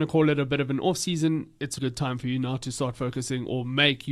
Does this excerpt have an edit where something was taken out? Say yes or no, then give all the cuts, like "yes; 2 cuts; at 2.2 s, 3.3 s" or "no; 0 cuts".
yes; 1 cut; at 1.8 s